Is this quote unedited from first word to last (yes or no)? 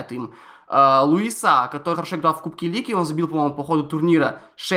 no